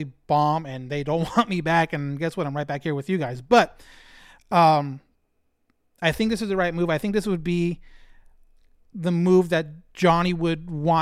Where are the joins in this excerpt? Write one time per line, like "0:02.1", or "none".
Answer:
none